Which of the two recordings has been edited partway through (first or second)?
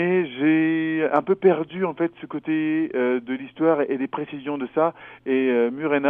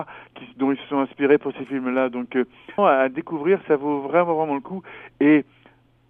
second